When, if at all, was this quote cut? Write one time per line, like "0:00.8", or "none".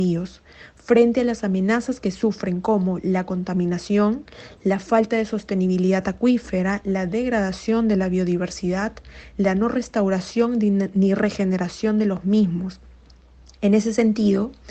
none

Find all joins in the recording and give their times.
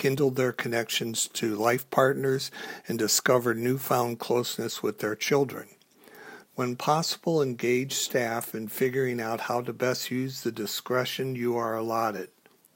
0:06.5

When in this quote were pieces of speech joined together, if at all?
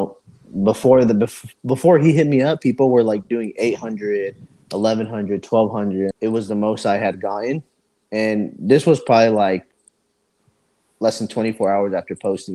0:06.1

